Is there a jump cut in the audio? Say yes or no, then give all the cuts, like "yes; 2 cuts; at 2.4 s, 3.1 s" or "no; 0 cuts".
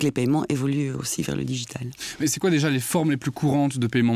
no; 0 cuts